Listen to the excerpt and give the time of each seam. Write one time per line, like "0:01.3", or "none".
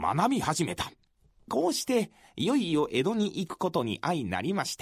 0:01.5